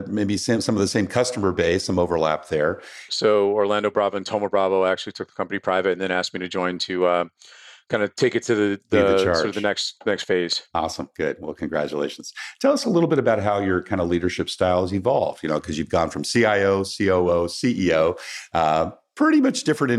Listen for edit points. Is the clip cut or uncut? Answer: cut